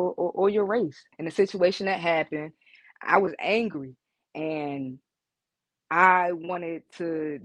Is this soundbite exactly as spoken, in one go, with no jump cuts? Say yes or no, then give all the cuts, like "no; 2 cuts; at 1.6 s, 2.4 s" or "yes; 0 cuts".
no; 1 cut; at 1.1 s